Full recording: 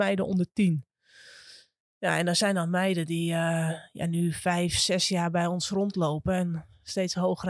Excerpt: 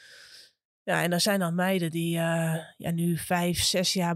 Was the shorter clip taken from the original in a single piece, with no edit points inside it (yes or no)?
yes